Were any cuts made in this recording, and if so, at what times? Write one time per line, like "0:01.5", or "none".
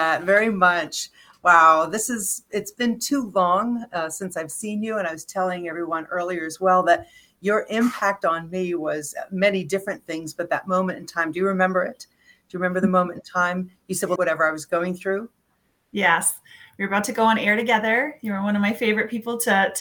0:14.2